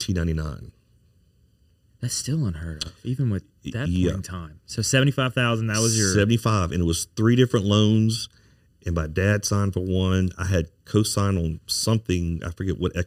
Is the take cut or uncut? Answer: uncut